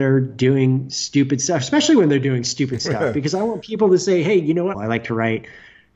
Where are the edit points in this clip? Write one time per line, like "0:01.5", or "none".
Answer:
0:04.7